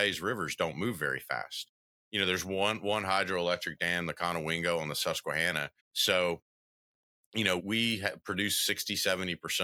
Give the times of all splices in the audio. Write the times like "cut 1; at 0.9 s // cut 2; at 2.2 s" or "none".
cut 1; at 5.8 s // cut 2; at 7.6 s